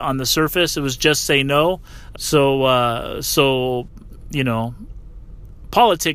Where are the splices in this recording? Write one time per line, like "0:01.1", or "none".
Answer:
0:02.1